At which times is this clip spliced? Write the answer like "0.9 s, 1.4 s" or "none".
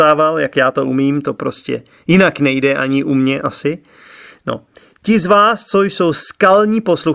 none